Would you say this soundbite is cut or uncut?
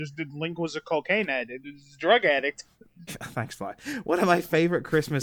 cut